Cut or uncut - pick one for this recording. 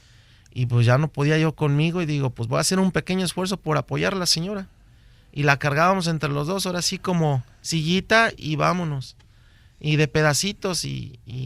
uncut